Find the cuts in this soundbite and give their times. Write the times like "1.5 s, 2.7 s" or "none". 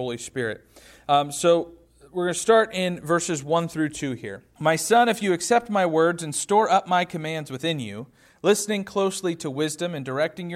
4.6 s

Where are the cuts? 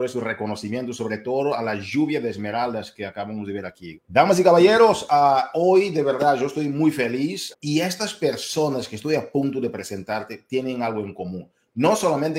3.9 s, 7.5 s

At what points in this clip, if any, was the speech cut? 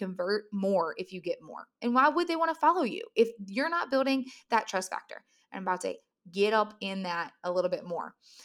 none

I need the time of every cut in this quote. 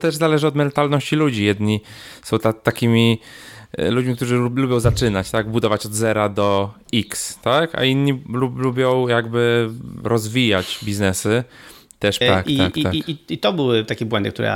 12.2 s

